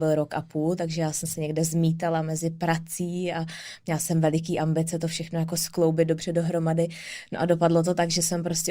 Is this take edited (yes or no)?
no